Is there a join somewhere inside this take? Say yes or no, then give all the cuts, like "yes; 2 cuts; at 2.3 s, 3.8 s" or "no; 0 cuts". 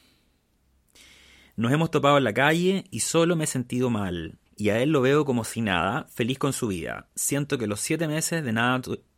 yes; 1 cut; at 4.5 s